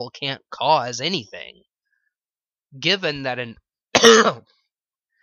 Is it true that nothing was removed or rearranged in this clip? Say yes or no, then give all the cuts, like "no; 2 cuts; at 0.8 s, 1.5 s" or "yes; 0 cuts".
yes; 0 cuts